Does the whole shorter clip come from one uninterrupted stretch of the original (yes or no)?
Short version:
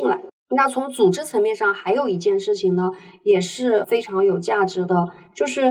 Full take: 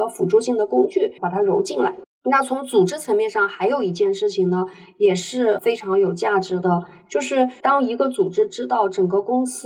yes